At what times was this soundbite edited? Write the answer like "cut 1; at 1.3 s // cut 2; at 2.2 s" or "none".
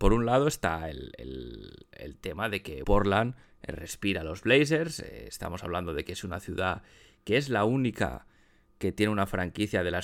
cut 1; at 2.8 s